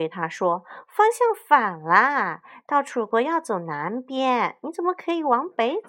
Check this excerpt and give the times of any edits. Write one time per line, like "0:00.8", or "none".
none